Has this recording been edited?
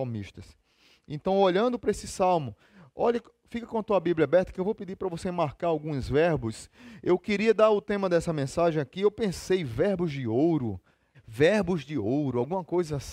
yes; 1 cut; at 11.1 s

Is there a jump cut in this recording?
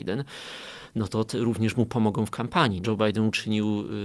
yes; 1 cut; at 2.8 s

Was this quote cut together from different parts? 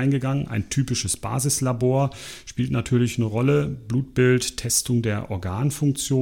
no; 0 cuts

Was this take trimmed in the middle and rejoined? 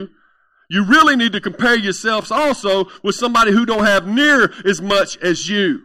no; 0 cuts

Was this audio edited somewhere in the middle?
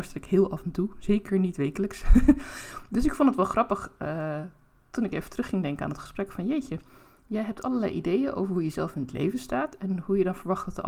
no; 0 cuts

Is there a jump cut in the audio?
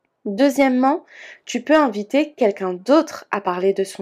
no; 0 cuts

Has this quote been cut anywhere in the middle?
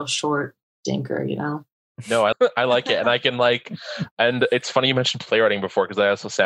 yes; 1 cut; at 2.3 s

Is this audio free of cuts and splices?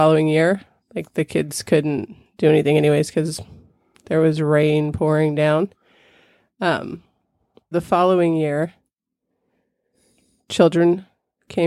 no; 1 cut; at 7.7 s

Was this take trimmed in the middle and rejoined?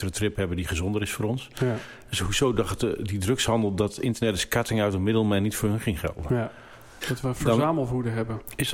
yes; 1 cut; at 7.0 s

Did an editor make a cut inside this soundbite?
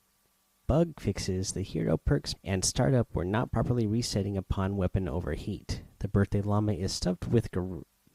yes; 2 cuts; at 2.3 s, 6.0 s

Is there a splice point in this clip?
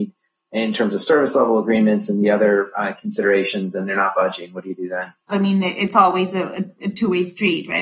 yes; 1 cut; at 5.3 s

